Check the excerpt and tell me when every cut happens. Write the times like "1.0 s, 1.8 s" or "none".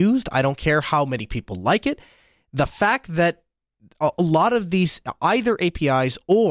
none